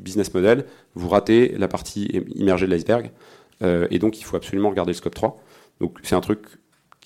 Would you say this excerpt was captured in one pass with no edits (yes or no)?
yes